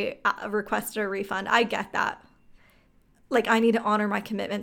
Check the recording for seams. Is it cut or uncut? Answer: uncut